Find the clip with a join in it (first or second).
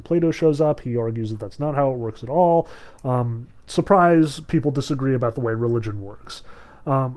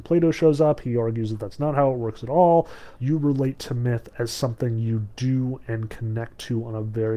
second